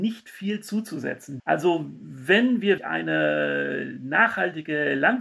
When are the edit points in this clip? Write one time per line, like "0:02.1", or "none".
0:01.4
0:02.8